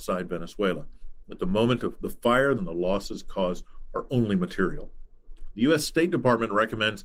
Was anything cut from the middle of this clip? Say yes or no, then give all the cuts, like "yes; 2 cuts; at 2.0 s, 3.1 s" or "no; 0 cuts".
yes; 1 cut; at 2.6 s